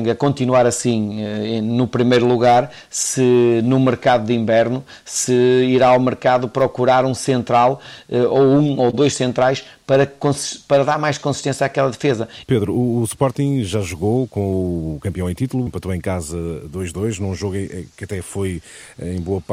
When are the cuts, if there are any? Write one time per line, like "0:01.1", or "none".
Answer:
0:12.4
0:15.7